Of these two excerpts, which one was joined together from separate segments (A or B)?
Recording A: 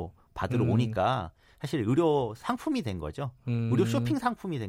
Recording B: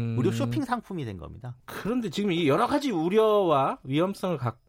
B